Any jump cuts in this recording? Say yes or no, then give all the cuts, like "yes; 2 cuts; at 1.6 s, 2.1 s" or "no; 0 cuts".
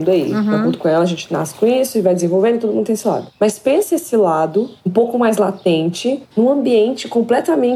yes; 3 cuts; at 3.3 s, 4.8 s, 6.3 s